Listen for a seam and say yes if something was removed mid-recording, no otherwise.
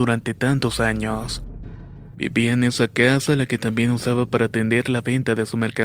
yes